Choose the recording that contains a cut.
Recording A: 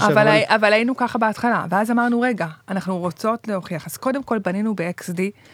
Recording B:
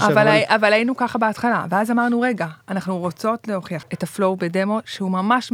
B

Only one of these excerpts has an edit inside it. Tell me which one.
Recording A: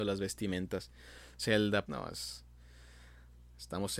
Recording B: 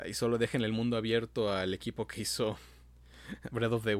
A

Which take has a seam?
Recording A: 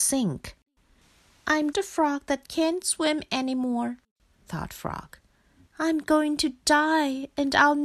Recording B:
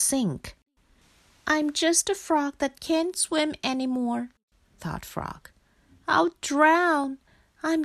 A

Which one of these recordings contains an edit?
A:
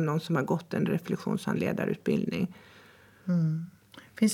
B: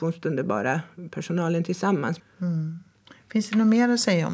B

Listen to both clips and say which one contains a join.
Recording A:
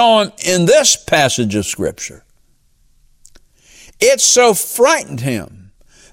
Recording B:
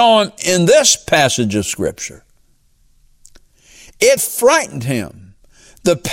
B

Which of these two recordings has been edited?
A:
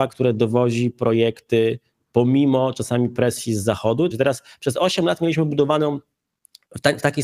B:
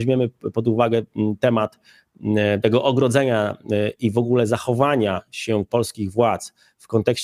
A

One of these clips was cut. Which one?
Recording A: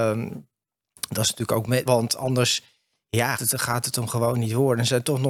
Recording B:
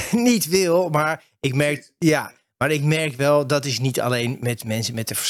A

